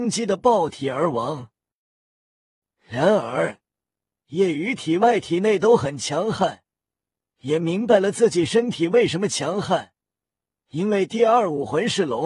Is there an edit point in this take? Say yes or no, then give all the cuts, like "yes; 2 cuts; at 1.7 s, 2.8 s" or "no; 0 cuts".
no; 0 cuts